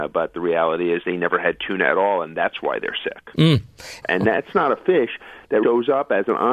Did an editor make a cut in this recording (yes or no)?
yes